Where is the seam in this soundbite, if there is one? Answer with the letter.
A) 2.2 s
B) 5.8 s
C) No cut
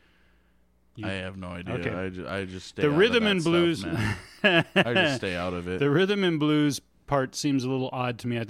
C